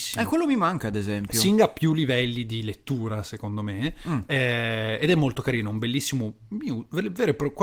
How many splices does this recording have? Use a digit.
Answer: 0